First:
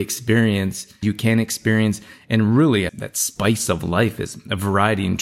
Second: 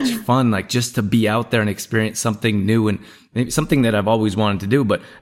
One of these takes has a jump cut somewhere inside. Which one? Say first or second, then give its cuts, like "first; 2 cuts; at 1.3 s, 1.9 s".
first; 2 cuts; at 1.0 s, 2.9 s